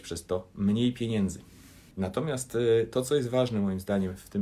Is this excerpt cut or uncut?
cut